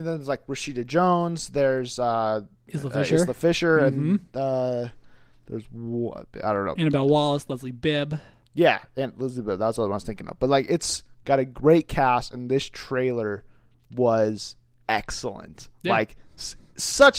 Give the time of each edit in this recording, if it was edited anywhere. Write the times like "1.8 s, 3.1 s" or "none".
none